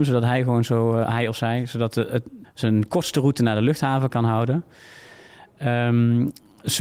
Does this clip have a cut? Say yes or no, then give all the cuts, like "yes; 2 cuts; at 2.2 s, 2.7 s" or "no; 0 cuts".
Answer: yes; 2 cuts; at 2.4 s, 4.1 s